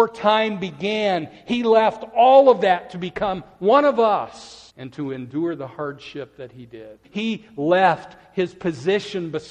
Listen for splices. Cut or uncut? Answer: cut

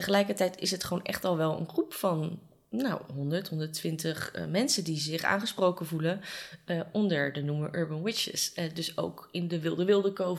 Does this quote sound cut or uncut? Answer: uncut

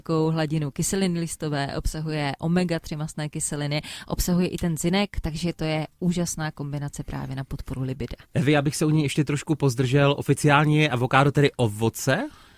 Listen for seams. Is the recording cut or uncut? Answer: uncut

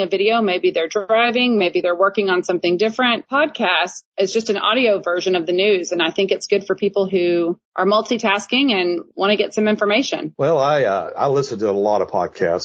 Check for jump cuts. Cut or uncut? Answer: uncut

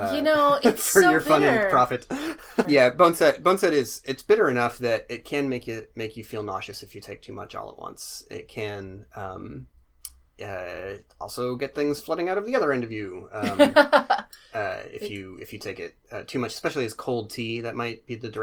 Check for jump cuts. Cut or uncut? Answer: cut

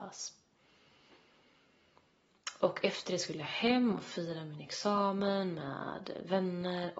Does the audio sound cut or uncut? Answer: uncut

